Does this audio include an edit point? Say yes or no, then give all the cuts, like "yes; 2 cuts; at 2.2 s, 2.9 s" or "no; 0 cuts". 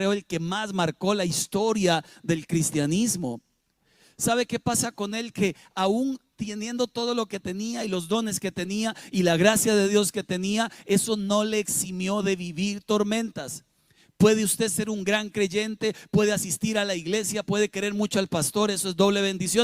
no; 0 cuts